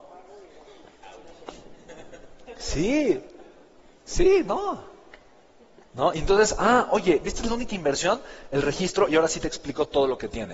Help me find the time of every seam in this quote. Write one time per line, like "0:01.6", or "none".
none